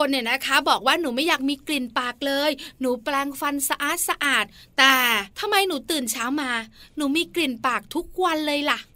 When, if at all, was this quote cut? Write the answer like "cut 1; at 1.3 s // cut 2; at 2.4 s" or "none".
cut 1; at 5.3 s

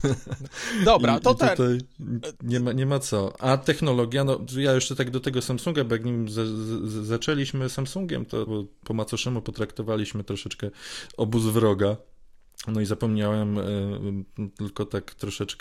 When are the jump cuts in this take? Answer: cut 1; at 8.5 s

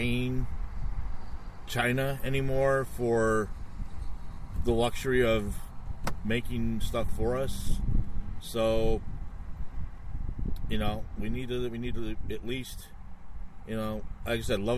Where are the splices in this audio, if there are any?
cut 1; at 8.4 s

